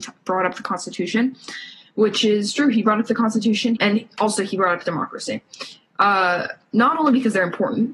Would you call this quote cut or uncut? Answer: cut